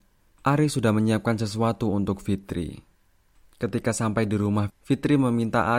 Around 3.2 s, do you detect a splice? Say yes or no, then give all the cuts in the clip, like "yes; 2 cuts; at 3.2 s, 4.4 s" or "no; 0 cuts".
no; 1 cut; at 4.7 s